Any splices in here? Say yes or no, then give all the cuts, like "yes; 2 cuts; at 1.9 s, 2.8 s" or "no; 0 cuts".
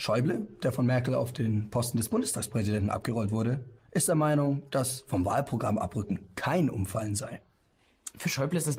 no; 0 cuts